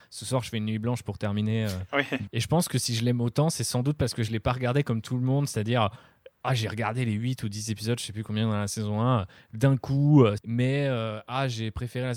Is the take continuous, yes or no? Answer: no